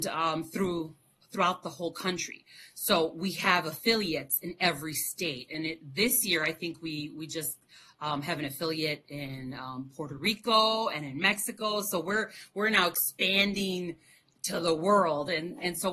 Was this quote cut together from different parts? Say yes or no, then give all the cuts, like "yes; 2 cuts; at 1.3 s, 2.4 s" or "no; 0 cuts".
no; 0 cuts